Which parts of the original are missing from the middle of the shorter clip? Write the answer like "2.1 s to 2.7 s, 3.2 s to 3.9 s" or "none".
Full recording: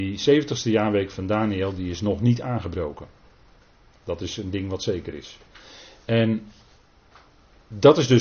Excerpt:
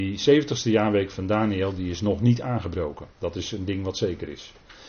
3.1 s to 4.0 s